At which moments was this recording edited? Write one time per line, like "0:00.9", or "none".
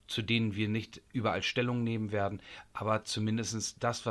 0:01.1